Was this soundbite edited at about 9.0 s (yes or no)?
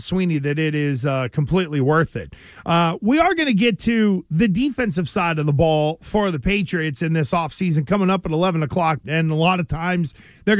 yes